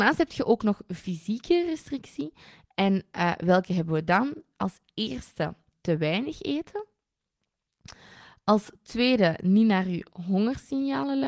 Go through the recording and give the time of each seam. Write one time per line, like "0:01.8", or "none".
none